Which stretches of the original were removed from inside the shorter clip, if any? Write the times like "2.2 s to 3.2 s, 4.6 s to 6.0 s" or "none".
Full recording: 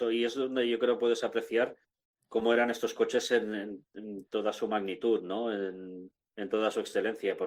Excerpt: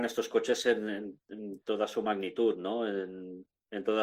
none